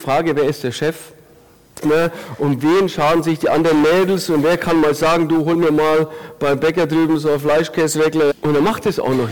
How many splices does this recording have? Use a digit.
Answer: 2